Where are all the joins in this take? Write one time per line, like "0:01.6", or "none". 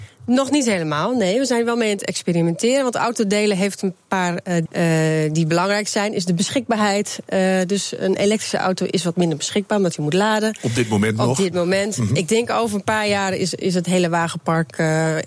0:04.7